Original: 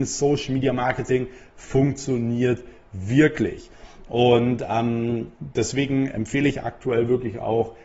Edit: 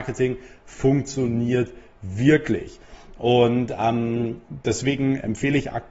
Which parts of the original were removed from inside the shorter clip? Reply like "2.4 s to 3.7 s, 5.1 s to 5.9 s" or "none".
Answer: none

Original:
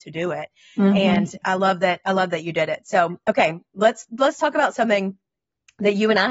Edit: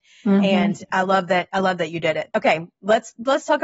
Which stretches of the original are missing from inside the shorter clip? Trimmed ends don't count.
2.8 s to 3.2 s

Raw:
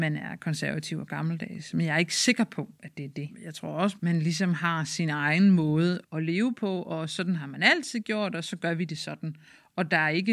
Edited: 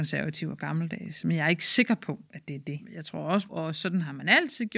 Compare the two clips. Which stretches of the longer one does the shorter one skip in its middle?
4.0 s to 6.8 s

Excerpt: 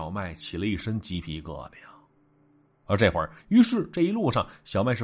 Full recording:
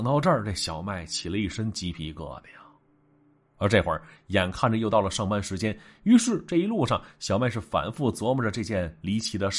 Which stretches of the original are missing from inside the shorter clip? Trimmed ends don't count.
4.1 s to 5.9 s

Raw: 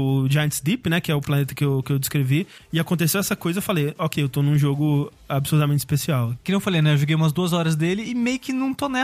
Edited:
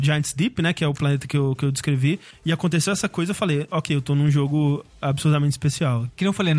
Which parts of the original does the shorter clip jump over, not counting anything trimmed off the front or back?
none

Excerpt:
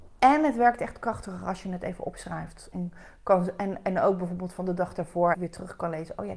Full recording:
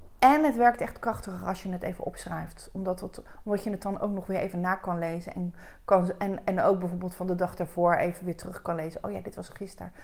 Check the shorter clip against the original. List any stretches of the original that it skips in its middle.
2.7 s to 5.3 s, 8.0 s to 8.2 s

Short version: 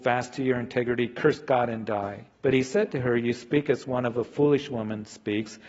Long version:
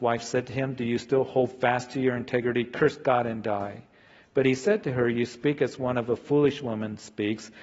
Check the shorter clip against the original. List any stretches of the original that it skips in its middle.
3.9 s to 4.3 s

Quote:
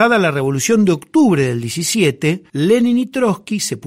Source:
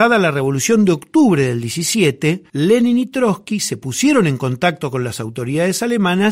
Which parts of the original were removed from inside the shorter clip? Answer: none

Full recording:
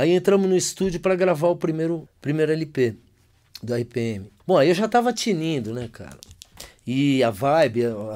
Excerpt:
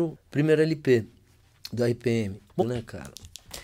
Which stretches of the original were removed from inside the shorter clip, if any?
4.5 s to 5.7 s

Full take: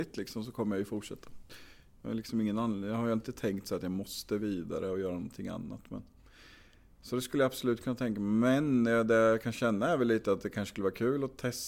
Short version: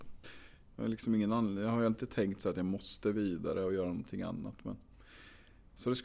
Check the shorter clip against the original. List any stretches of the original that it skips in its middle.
none

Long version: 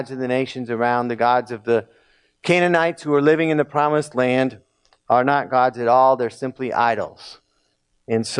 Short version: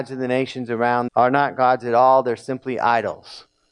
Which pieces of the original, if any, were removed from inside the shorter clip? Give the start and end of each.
1.1 s to 5.0 s

